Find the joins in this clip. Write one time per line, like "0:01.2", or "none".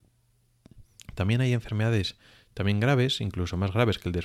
0:01.0